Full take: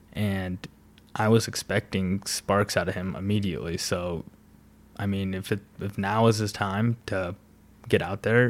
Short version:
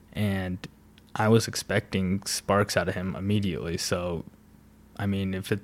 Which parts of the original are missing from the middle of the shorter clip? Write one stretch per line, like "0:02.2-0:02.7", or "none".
none